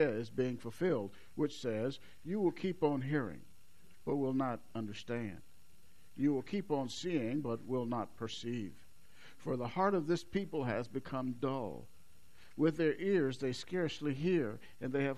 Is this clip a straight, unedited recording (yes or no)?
yes